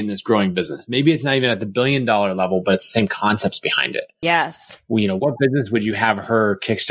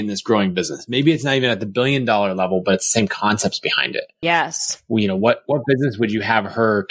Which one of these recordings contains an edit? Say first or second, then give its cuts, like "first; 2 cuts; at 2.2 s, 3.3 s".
first; 1 cut; at 5.2 s